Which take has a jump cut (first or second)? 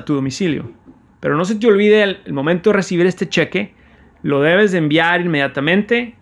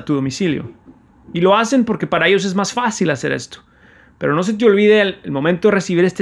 first